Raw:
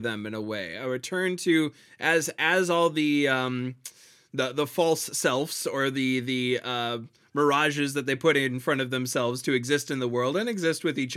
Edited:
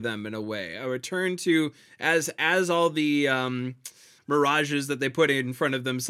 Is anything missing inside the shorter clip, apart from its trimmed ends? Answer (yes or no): yes